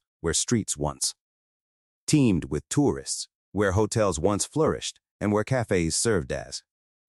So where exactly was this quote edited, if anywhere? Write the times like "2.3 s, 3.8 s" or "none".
none